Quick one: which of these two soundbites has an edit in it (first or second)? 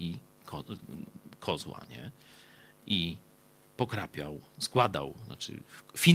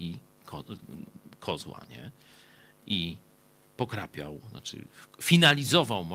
second